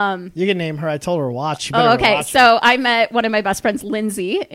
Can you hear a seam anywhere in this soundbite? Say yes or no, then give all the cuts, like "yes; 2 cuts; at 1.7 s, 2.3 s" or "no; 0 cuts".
no; 0 cuts